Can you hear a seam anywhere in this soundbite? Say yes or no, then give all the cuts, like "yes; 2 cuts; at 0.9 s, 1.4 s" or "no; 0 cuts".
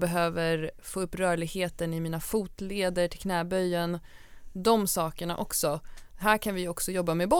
no; 0 cuts